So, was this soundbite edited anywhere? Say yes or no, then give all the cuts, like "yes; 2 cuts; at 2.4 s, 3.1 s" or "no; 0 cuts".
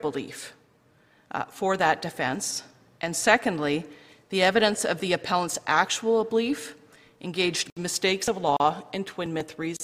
no; 0 cuts